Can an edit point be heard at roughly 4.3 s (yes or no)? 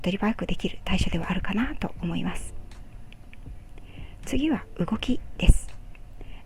no